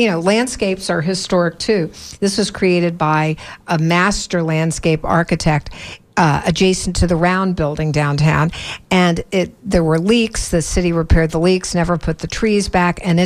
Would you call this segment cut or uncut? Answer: uncut